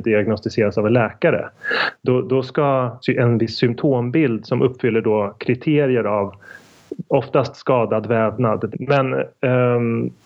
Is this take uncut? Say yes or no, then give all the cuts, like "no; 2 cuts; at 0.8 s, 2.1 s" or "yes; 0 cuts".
no; 2 cuts; at 3.0 s, 8.7 s